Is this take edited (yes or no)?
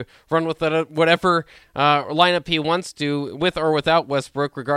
no